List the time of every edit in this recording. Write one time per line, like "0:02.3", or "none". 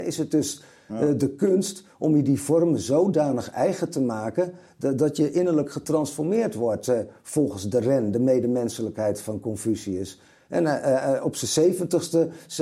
none